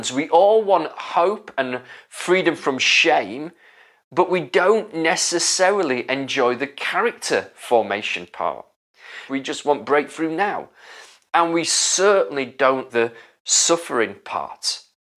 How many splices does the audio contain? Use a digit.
2